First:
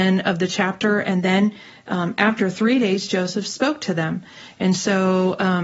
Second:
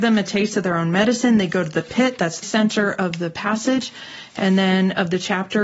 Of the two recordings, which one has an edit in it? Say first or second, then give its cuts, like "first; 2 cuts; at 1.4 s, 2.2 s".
second; 1 cut; at 2.4 s